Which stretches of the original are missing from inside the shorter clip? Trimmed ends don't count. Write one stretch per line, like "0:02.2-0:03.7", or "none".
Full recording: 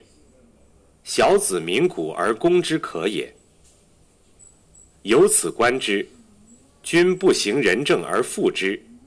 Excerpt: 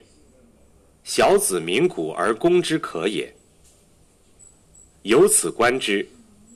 none